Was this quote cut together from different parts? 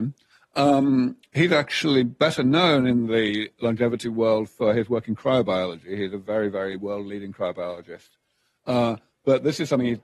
no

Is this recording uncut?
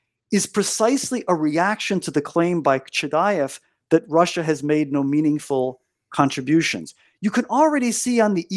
yes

